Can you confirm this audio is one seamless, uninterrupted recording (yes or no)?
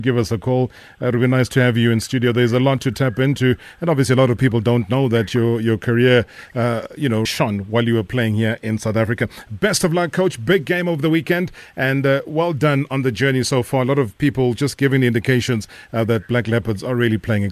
no